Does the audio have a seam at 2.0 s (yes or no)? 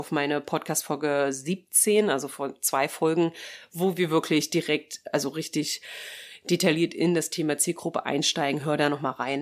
no